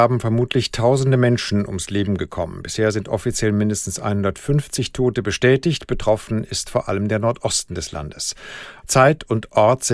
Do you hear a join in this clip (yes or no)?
yes